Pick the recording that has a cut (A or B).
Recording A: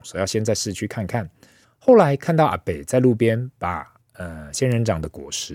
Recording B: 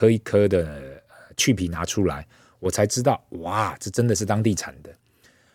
A